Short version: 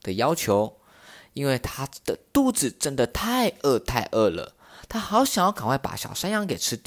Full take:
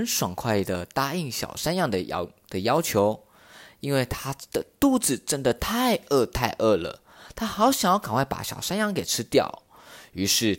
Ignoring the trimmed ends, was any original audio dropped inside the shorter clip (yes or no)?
no